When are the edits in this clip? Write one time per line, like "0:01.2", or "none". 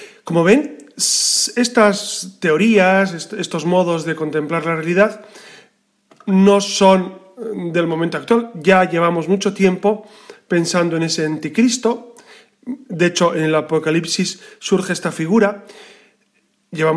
none